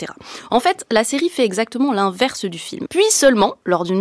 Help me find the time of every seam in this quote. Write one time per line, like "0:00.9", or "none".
0:02.8